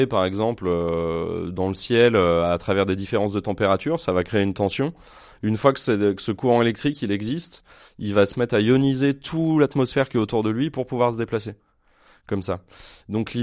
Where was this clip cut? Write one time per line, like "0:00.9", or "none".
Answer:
none